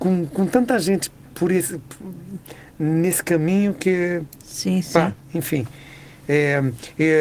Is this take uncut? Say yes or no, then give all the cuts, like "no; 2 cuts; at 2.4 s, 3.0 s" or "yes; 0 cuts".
yes; 0 cuts